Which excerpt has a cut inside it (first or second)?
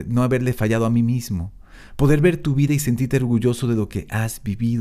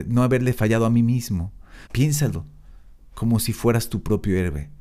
second